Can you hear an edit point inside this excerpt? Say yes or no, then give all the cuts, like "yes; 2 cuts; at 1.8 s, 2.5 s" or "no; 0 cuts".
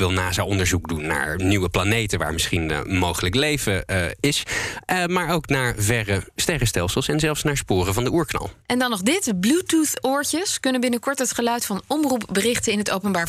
yes; 1 cut; at 8.6 s